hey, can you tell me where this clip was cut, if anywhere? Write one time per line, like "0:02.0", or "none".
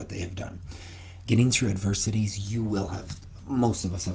0:01.2